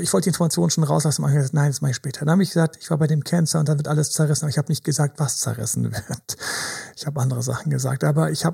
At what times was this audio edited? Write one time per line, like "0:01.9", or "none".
none